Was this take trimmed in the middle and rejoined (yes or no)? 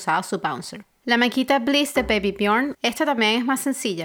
yes